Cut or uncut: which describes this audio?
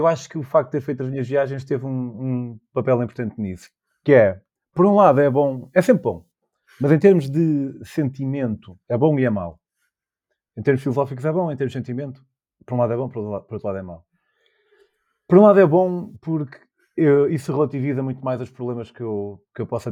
cut